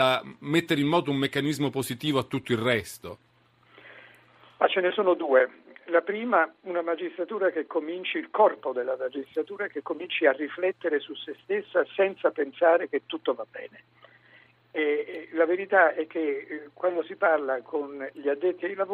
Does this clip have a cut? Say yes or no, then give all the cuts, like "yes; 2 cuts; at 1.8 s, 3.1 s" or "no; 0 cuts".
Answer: no; 0 cuts